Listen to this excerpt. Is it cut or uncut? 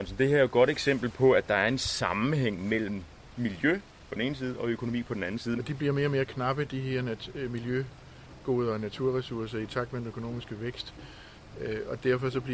cut